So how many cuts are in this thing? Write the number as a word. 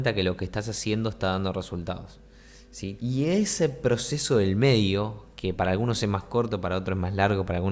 one